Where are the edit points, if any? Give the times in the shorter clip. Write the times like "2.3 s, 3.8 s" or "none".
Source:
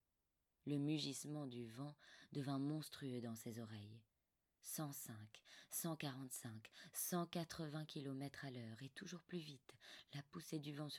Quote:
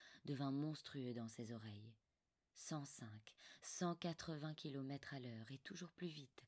3.6 s

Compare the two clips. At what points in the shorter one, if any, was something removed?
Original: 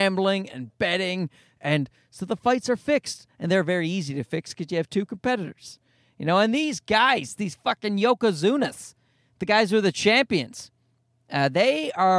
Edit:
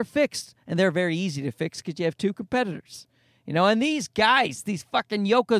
none

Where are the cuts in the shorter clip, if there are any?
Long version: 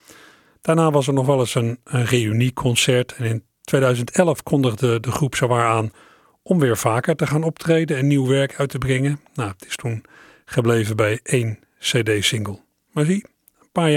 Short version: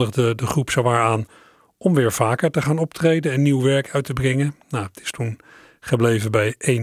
none

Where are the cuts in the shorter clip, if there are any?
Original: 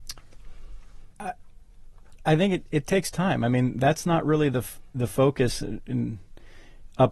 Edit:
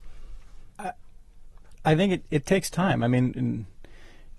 3.3 s

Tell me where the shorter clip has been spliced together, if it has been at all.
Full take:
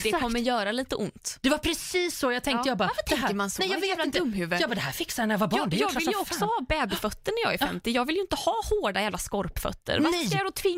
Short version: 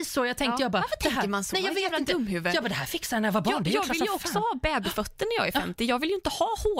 none

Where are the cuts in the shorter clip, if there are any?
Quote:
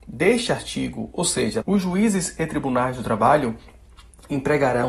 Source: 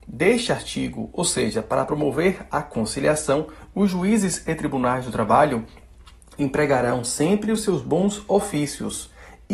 1.6 s

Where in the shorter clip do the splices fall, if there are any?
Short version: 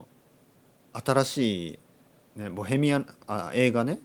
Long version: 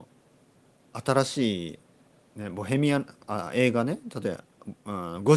none

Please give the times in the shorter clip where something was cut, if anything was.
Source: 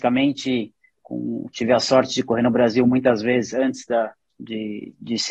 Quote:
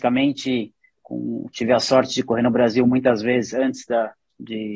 none

